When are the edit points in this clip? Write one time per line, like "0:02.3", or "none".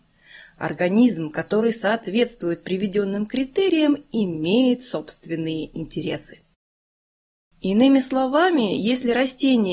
none